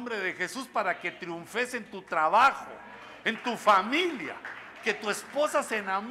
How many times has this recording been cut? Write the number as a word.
one